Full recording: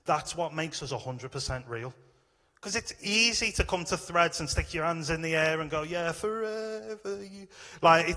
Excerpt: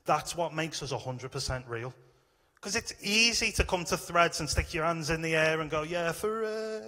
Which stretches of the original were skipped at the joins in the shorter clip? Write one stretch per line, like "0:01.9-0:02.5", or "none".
none